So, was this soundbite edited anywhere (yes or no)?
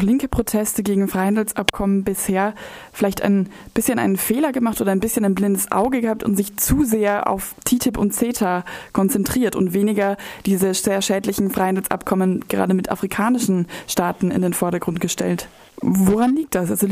yes